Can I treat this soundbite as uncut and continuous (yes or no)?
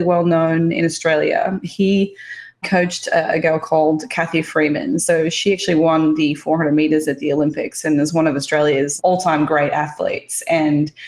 yes